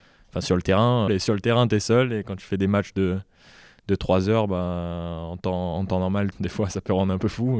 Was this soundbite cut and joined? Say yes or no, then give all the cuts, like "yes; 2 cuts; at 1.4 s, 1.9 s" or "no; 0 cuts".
yes; 2 cuts; at 1.1 s, 6.3 s